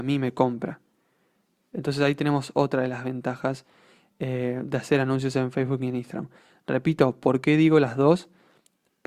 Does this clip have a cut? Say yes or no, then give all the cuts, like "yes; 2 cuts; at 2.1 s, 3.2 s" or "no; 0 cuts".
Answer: no; 0 cuts